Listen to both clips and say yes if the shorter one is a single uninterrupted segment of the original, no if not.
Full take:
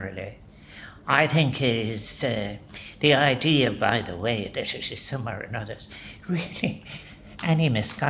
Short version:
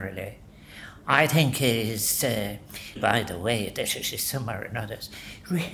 no